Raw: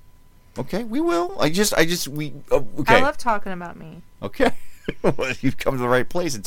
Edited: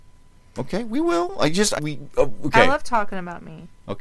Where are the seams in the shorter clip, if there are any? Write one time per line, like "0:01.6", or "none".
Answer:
0:01.8